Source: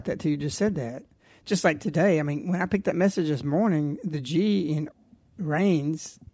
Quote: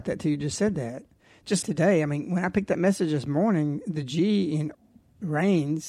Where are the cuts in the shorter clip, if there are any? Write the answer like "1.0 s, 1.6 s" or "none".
1.6 s